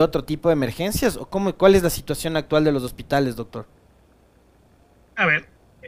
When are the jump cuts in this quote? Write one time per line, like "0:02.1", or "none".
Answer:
none